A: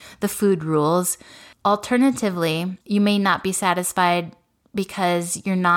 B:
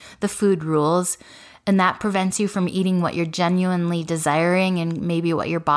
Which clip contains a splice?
A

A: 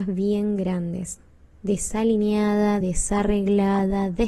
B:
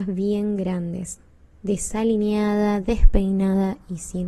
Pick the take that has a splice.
B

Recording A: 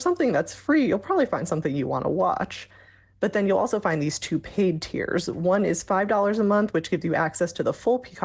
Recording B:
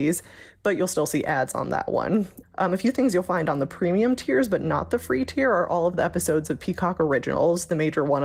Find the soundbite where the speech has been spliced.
B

